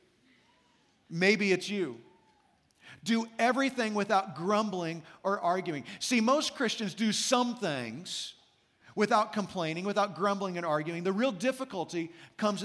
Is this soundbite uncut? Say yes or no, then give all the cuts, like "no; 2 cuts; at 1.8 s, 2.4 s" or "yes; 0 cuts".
yes; 0 cuts